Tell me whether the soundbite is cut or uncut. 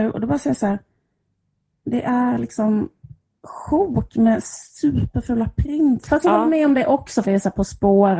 cut